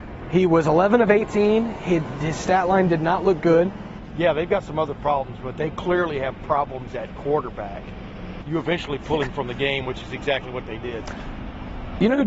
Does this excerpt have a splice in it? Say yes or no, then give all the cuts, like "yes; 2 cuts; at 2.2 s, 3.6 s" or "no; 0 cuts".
yes; 2 cuts; at 4.0 s, 8.4 s